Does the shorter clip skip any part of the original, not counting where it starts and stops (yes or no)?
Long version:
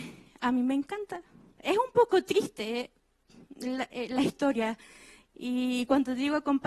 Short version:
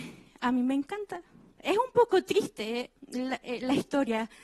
yes